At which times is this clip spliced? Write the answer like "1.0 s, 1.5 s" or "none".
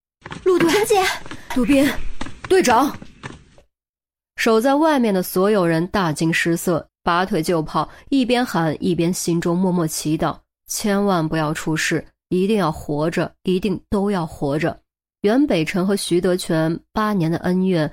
1.5 s, 6.9 s, 15.1 s